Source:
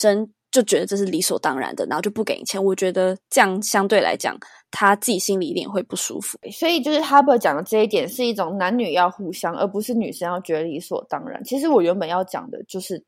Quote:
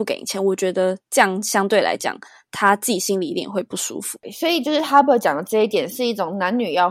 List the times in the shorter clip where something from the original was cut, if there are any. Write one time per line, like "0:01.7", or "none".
none